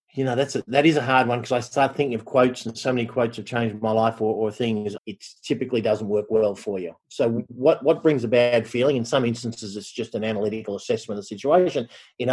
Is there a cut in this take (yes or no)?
yes